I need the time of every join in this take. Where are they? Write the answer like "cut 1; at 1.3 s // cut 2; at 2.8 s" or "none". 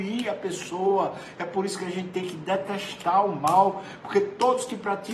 none